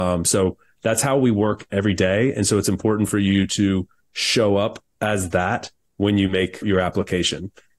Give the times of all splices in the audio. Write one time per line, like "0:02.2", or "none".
0:06.6